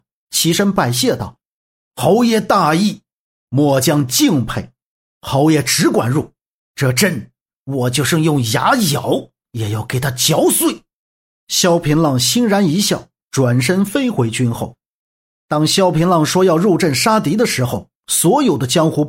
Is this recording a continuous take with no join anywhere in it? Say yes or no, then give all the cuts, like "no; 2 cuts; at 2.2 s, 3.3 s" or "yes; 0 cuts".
yes; 0 cuts